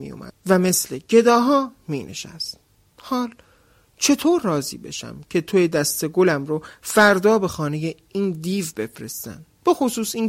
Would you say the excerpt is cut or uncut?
uncut